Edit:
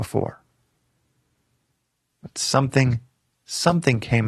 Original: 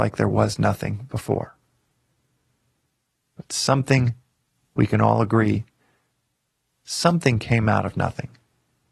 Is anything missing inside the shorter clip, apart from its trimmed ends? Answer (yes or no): yes